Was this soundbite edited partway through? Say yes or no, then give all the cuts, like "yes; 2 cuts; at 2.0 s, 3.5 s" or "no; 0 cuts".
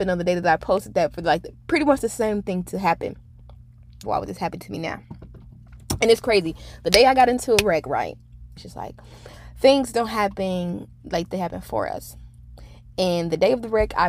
yes; 3 cuts; at 4.0 s, 8.6 s, 11.3 s